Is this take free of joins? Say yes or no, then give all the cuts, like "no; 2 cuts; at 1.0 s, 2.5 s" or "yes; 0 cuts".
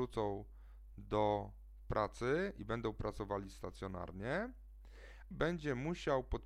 no; 1 cut; at 5.3 s